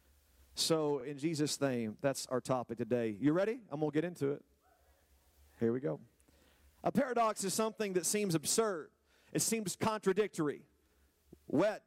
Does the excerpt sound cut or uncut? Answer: uncut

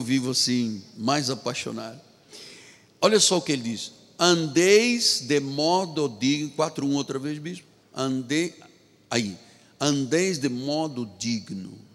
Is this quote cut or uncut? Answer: cut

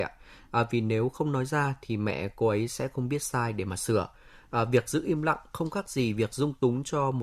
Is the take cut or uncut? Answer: uncut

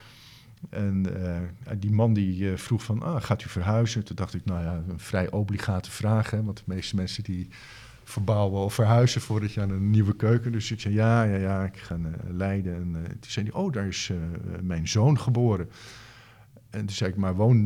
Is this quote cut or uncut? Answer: uncut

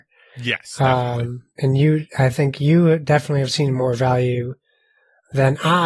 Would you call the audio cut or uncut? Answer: uncut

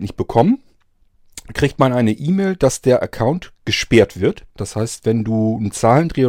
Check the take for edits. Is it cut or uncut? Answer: cut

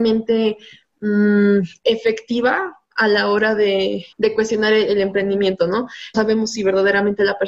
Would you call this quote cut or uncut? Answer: cut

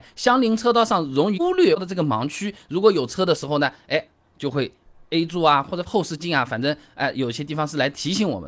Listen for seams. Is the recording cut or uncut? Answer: uncut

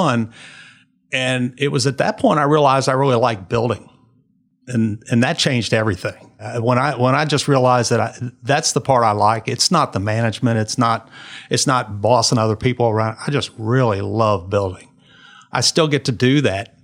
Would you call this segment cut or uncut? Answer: uncut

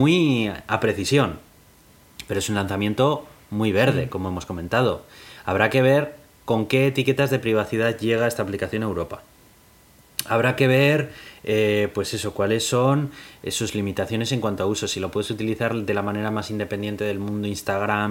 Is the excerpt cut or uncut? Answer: uncut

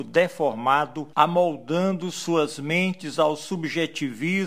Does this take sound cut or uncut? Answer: cut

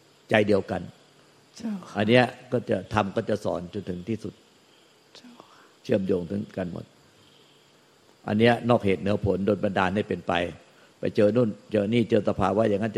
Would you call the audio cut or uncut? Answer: uncut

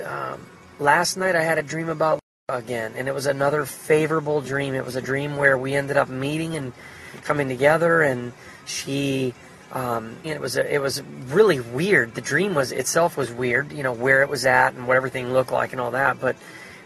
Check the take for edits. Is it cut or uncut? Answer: cut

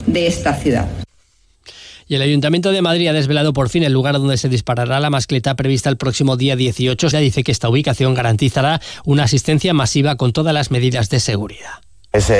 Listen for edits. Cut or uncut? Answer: cut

